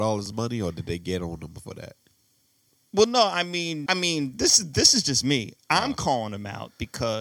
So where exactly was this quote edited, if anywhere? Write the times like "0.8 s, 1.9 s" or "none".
3.9 s